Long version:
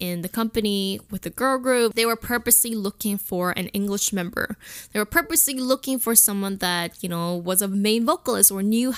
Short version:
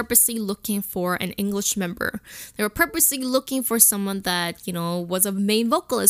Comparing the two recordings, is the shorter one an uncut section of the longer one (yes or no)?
yes